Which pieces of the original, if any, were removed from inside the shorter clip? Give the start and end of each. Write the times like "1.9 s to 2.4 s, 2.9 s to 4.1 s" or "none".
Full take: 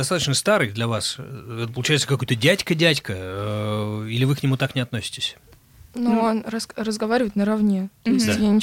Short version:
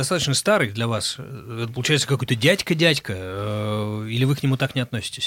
none